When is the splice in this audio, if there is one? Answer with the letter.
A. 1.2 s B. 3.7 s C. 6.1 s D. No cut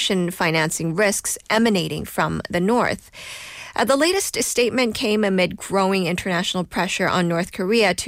D